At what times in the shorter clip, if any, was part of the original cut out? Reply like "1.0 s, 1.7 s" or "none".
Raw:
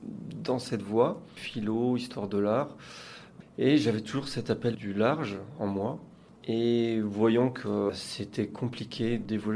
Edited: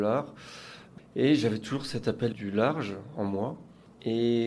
none